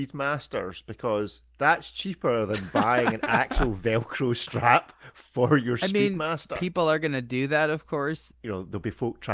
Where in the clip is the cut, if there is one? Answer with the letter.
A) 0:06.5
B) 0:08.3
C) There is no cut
B